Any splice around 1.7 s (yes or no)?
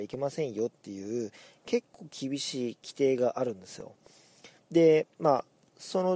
no